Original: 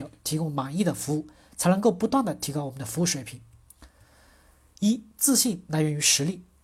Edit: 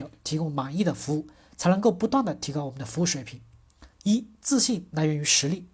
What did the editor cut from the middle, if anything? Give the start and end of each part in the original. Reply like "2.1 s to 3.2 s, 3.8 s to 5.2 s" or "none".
3.9 s to 4.7 s